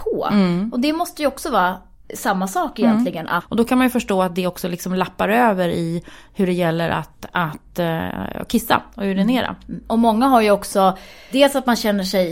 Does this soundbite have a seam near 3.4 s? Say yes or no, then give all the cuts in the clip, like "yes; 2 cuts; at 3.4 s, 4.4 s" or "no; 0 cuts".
yes; 1 cut; at 3.4 s